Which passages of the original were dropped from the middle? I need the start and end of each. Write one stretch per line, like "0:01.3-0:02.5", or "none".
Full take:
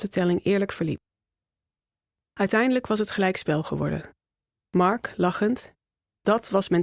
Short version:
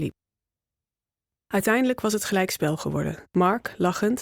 0:04.1-0:04.7